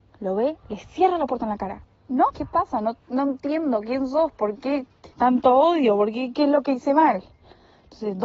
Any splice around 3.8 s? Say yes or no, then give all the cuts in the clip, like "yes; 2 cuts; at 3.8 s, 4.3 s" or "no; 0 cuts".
no; 3 cuts; at 2.3 s, 5.1 s, 6.3 s